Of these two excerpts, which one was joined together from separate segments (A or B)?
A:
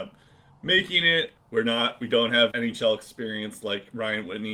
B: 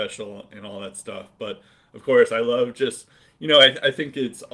A